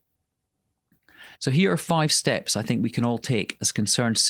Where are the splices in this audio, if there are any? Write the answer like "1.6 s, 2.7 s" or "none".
1.3 s